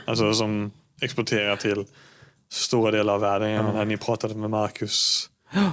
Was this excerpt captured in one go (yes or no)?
yes